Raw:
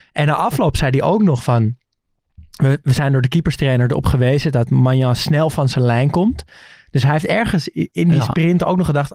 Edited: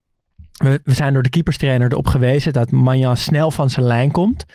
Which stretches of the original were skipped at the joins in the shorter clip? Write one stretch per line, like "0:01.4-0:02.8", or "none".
none